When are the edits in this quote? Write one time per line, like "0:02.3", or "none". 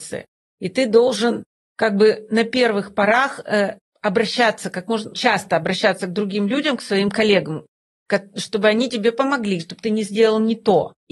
0:05.1
0:09.6